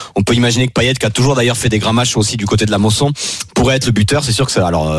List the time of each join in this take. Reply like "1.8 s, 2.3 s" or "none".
none